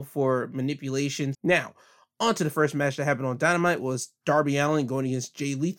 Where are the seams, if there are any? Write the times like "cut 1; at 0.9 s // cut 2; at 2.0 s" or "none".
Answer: cut 1; at 1.3 s